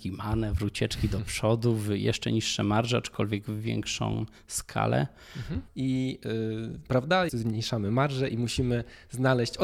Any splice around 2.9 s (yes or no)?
no